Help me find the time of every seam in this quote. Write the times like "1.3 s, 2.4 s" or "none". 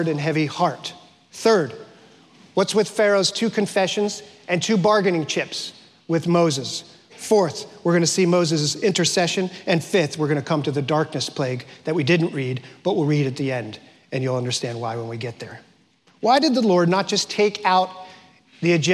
none

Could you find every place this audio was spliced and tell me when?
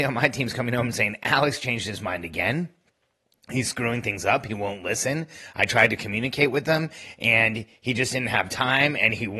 none

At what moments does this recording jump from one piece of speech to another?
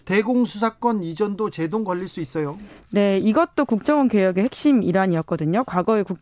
none

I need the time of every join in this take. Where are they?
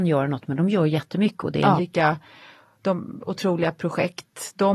1.8 s

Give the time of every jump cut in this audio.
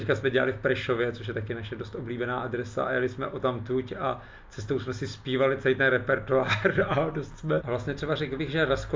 7.6 s

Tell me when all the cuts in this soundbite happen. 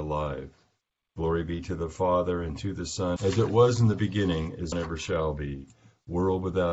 3.2 s, 4.7 s

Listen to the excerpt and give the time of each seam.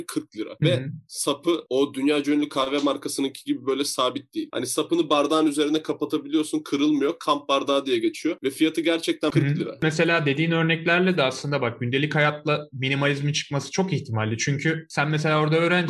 none

